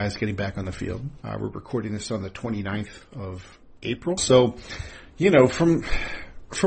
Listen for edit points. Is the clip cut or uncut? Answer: cut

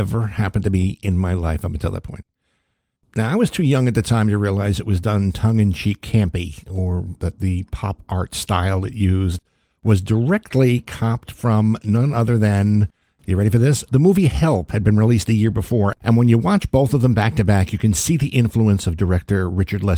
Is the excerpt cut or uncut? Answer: cut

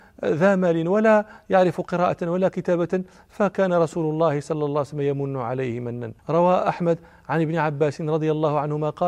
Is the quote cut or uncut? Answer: cut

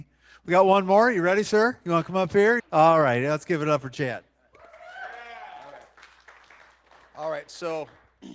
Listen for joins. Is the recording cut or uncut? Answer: cut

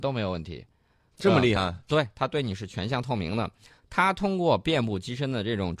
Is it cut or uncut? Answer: uncut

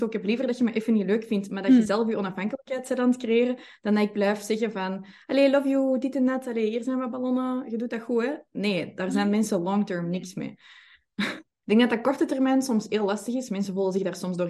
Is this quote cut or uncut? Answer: uncut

